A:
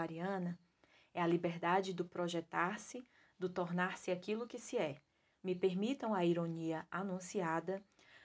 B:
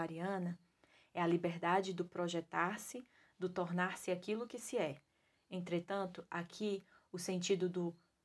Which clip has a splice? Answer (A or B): A